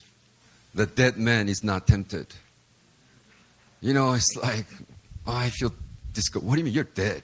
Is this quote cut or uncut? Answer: uncut